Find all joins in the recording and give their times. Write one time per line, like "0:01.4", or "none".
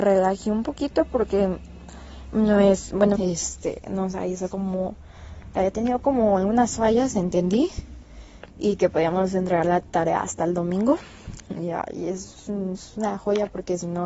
0:03.1